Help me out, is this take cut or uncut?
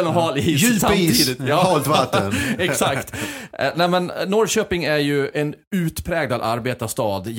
uncut